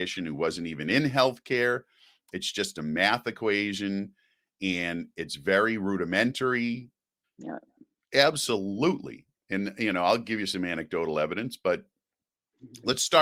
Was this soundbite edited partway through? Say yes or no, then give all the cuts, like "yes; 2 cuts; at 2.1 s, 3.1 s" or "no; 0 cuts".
yes; 1 cut; at 7.2 s